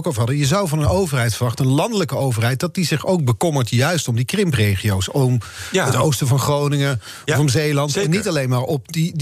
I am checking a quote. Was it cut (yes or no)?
no